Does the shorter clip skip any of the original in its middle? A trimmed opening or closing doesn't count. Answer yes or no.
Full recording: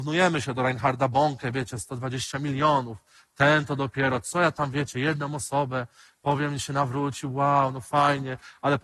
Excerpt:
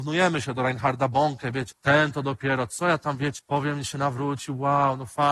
yes